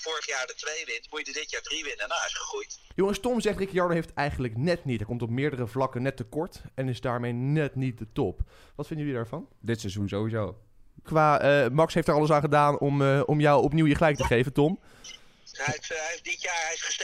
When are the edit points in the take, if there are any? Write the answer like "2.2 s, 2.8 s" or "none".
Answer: 11.0 s, 15.5 s